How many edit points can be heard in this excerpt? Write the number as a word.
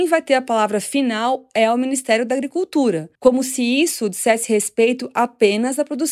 one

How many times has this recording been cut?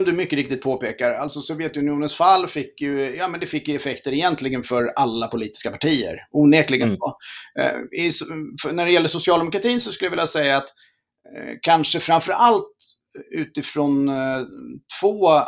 zero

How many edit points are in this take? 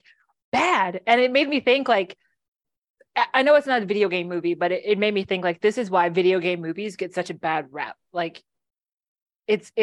zero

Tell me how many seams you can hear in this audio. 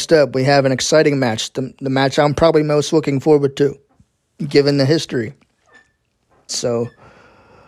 one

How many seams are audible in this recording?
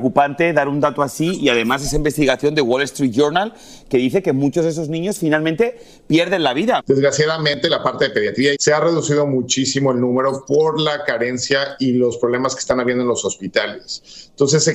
two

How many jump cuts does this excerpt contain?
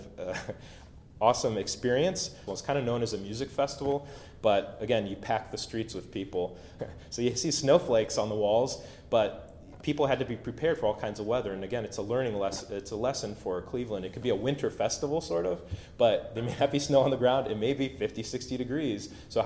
two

